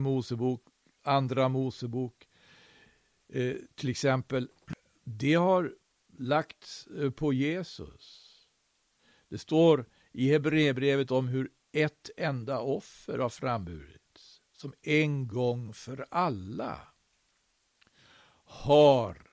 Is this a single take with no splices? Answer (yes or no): yes